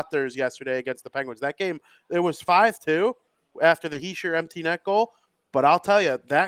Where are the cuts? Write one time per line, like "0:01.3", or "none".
none